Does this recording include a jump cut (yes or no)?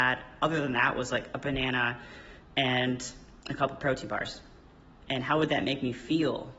yes